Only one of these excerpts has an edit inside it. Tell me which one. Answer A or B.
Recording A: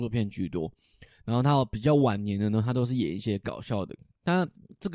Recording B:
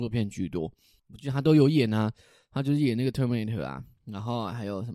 B